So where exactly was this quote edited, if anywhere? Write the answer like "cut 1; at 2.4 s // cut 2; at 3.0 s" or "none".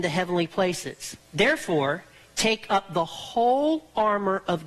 cut 1; at 1.3 s